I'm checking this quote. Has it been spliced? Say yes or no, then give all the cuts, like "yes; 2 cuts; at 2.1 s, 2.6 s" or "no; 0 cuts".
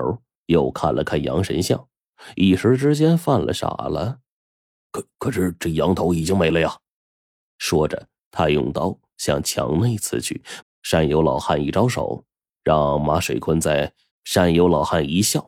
yes; 3 cuts; at 7.4 s, 10.6 s, 14.1 s